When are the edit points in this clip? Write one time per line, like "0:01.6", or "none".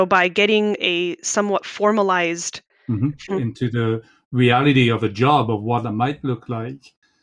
0:03.3